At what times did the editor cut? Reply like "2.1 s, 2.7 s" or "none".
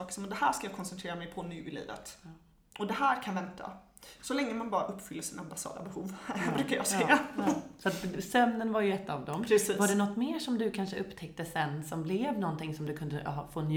none